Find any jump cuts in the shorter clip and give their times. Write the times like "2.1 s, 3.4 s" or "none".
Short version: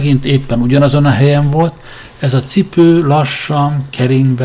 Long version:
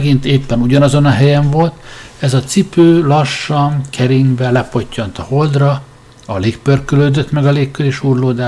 none